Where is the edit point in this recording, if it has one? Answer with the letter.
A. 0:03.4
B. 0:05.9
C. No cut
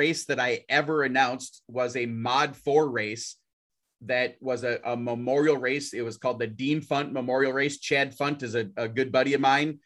C